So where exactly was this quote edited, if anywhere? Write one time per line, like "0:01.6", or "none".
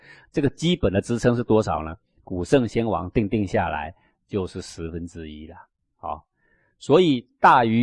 none